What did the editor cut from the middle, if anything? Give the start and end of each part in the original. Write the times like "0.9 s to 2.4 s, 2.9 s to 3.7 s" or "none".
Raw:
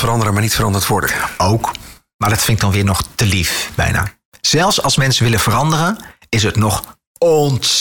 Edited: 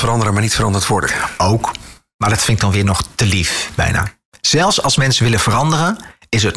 none